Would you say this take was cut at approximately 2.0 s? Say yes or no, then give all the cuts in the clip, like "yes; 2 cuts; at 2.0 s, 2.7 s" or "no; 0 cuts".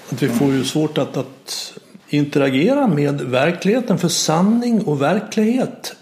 yes; 1 cut; at 2.0 s